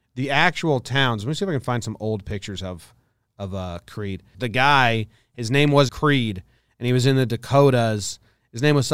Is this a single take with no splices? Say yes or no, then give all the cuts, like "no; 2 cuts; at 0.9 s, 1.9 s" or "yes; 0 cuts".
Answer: no; 2 cuts; at 4.3 s, 5.9 s